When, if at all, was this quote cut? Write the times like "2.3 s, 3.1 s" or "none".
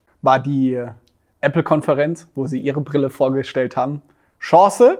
none